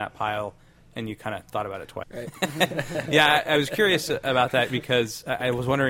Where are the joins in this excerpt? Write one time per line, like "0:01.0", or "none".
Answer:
0:02.0